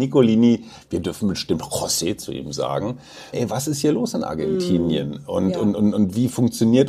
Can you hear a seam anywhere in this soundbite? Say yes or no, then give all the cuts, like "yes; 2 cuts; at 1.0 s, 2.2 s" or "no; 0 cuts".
yes; 1 cut; at 3.3 s